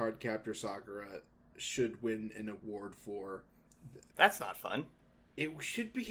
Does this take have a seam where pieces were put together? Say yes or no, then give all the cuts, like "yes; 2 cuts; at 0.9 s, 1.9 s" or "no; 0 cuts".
yes; 1 cut; at 4.1 s